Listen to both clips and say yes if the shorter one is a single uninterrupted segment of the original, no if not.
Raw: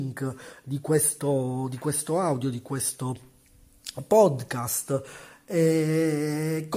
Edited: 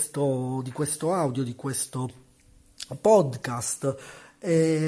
yes